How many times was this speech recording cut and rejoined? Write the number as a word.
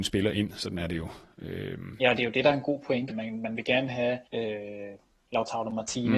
two